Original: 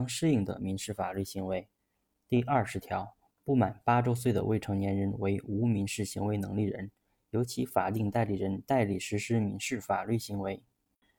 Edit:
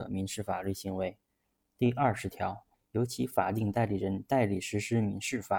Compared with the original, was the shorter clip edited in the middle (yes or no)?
yes